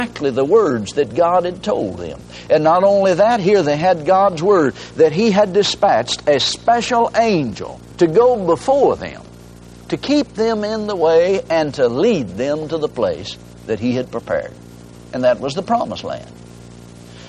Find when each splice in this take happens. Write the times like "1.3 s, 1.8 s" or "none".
7.9 s

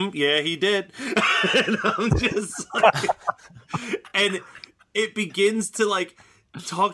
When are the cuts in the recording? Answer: none

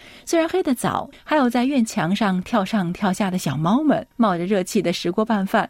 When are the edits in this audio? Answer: 1.1 s, 4.1 s

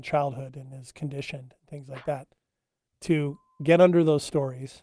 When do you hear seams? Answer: 2.9 s

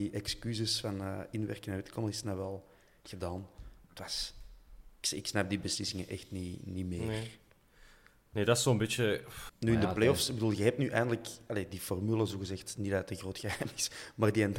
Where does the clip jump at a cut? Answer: 5.0 s, 9.5 s

